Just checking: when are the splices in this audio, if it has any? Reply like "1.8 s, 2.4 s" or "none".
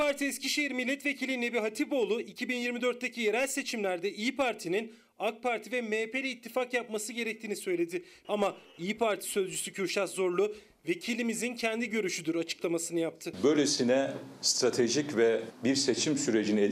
8.2 s